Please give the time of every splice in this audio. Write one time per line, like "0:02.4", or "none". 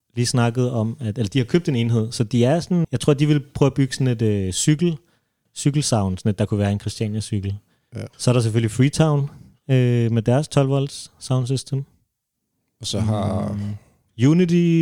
0:02.8
0:08.1